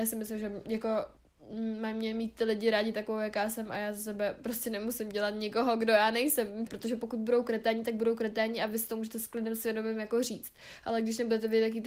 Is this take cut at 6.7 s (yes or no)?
yes